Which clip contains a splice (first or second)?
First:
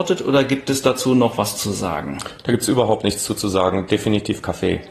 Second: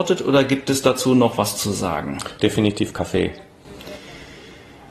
second